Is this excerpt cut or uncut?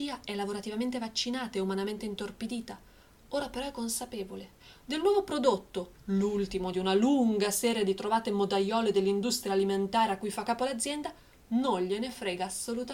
uncut